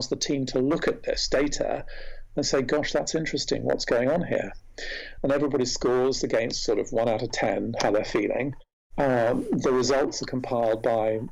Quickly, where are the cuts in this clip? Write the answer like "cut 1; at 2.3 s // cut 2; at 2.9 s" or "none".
cut 1; at 5.2 s

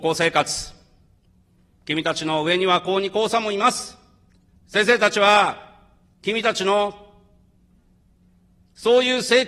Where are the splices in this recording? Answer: cut 1; at 4.6 s

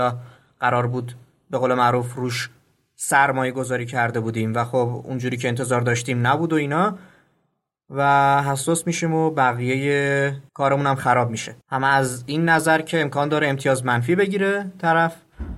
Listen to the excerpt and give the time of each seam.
cut 1; at 10.5 s // cut 2; at 11.6 s

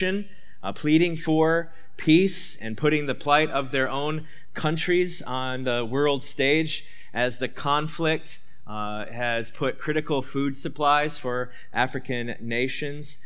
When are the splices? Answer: none

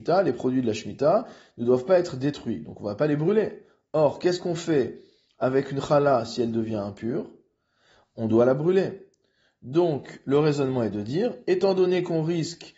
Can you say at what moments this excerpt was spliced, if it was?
none

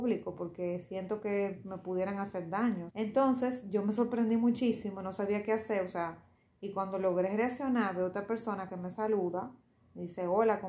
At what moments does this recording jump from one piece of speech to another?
cut 1; at 2.9 s

